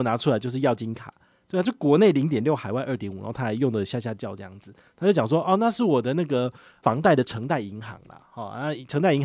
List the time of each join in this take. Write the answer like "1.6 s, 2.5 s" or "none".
none